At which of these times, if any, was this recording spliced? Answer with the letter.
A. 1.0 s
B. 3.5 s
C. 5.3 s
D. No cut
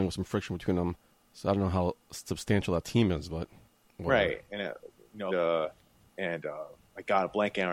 C